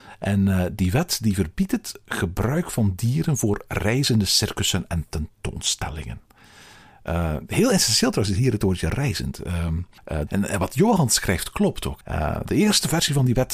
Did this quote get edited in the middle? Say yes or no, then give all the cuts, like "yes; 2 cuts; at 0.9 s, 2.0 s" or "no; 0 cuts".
yes; 2 cuts; at 10.3 s, 12.0 s